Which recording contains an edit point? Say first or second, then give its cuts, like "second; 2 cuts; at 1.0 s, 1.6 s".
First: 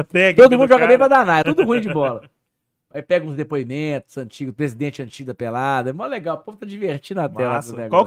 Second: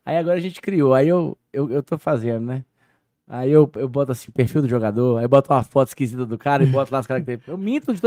first; 1 cut; at 1.4 s